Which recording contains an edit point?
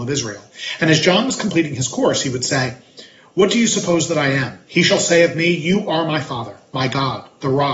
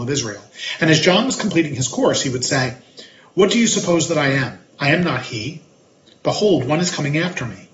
first; 1 cut; at 4.7 s

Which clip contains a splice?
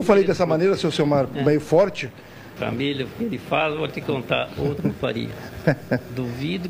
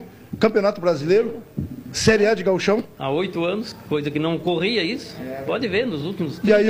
first; 1 cut; at 2.6 s

